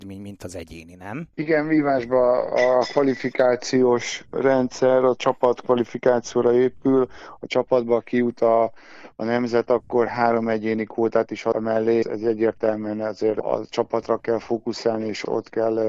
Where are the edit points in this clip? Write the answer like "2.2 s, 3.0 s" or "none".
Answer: 12.0 s